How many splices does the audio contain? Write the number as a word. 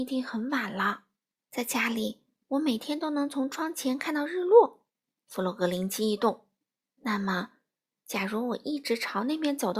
one